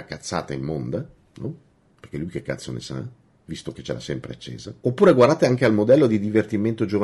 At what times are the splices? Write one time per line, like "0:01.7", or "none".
0:04.8